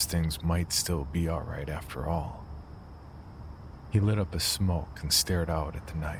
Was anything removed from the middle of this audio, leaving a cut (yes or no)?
no